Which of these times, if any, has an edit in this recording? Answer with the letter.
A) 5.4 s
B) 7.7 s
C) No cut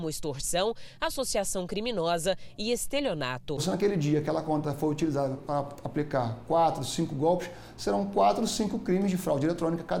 A